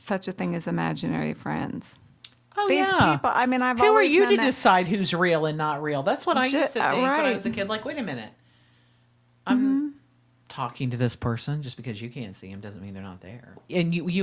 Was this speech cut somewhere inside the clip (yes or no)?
no